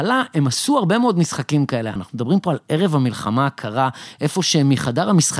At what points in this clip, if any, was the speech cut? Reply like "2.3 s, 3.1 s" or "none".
2.0 s